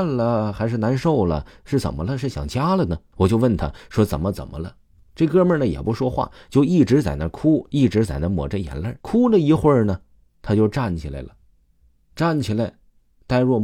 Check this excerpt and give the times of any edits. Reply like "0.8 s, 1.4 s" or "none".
3.1 s, 9.0 s